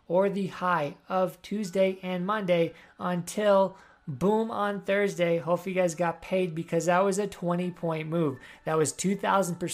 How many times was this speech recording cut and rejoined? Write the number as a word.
zero